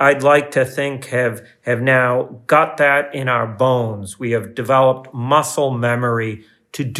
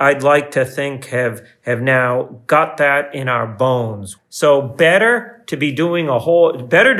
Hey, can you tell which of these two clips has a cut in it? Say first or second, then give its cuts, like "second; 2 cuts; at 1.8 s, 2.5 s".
second; 1 cut; at 4.2 s